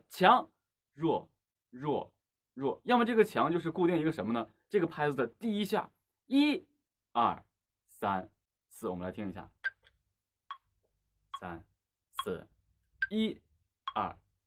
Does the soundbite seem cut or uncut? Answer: uncut